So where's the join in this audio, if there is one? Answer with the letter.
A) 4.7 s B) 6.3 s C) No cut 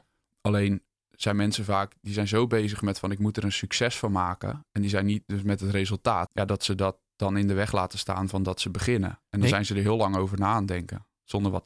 B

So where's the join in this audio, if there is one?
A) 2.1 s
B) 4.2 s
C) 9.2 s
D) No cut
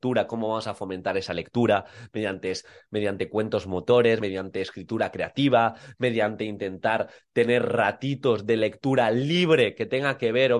D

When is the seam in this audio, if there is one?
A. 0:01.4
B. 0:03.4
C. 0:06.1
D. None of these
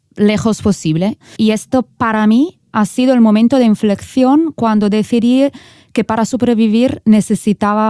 A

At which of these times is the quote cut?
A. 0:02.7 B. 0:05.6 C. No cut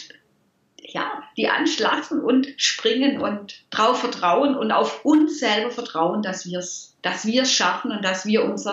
C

